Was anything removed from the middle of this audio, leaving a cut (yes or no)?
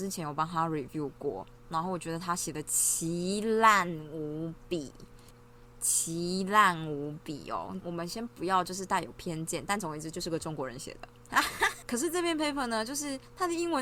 yes